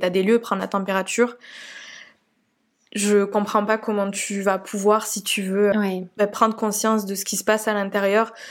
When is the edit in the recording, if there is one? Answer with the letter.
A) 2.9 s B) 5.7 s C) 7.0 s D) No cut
B